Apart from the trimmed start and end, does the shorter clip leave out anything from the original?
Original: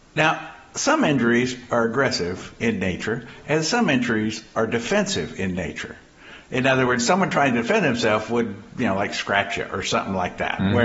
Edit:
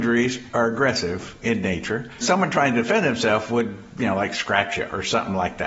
yes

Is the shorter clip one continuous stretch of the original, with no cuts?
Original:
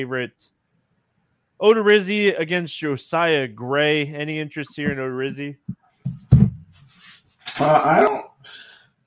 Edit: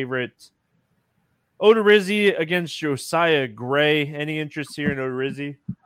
yes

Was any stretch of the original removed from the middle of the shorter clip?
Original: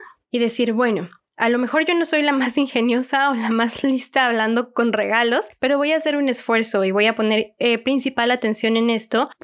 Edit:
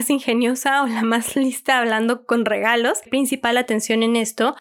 yes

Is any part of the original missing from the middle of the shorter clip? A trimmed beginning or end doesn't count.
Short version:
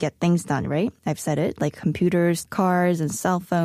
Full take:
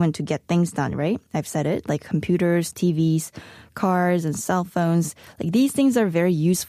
yes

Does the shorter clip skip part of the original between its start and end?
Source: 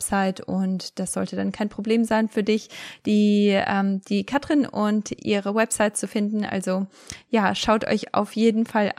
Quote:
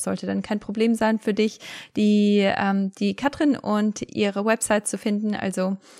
no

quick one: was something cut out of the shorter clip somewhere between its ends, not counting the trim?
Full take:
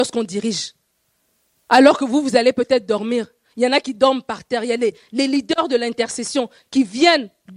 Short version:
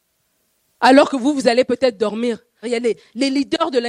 yes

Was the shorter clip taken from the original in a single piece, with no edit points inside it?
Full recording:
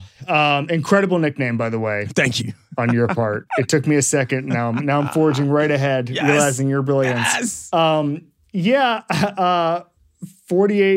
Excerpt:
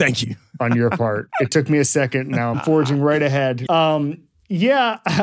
no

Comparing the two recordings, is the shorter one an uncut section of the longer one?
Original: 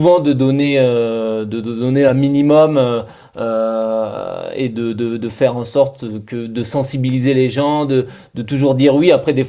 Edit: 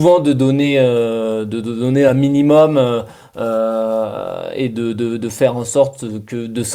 yes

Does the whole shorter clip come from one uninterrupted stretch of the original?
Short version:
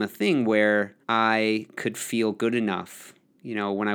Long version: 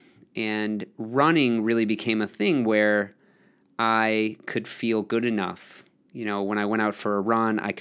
no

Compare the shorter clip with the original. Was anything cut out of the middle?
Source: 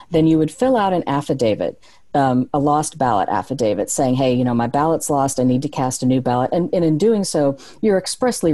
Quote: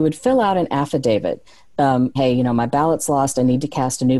yes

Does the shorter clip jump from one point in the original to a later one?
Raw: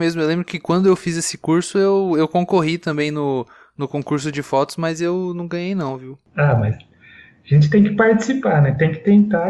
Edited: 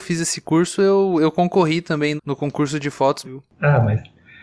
yes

